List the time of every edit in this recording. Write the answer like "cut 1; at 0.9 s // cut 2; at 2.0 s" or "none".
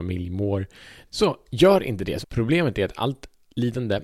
cut 1; at 1.1 s // cut 2; at 2.2 s

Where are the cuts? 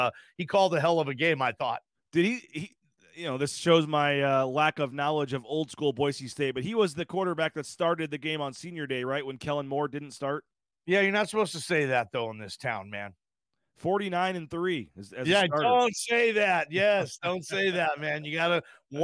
none

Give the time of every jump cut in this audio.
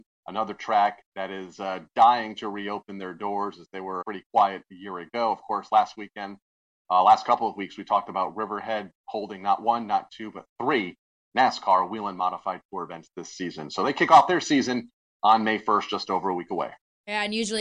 cut 1; at 4.0 s

